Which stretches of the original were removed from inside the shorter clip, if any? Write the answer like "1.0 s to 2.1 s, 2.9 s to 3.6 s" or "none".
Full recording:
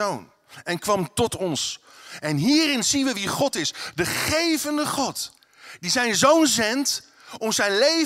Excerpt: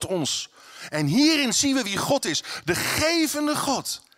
none